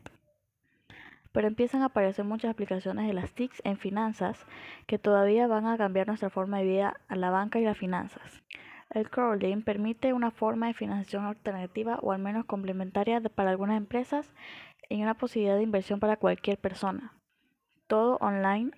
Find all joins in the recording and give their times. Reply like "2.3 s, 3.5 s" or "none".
1.2 s